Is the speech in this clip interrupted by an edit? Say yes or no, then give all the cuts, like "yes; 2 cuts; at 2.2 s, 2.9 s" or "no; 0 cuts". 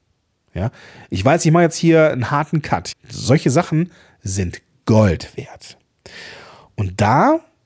yes; 1 cut; at 2.9 s